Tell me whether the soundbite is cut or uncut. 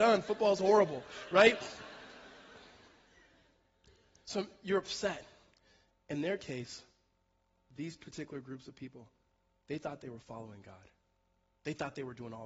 uncut